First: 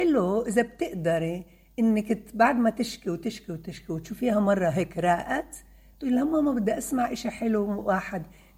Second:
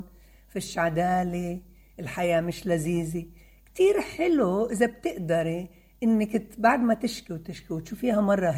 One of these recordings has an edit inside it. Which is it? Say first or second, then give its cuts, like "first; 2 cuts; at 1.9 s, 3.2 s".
second; 1 cut; at 7.3 s